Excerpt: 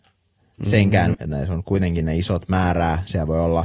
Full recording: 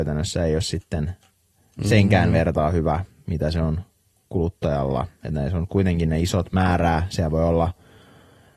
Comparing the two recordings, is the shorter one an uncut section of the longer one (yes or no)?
no